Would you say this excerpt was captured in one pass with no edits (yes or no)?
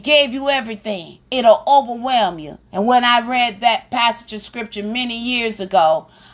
no